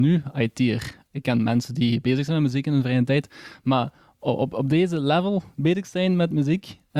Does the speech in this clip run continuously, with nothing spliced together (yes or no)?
no